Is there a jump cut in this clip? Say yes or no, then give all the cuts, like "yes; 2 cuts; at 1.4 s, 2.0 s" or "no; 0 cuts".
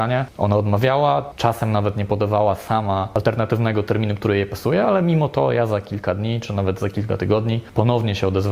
no; 0 cuts